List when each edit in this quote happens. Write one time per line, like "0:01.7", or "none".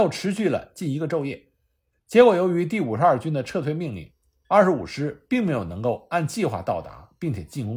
none